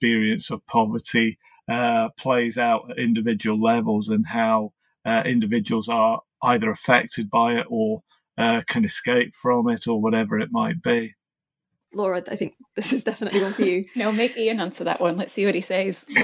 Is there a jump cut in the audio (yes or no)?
yes